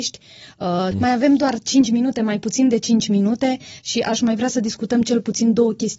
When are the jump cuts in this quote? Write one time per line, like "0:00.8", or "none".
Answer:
0:00.9